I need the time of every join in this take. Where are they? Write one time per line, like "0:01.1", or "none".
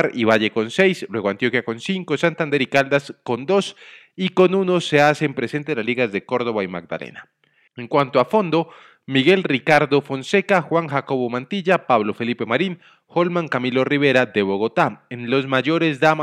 0:07.7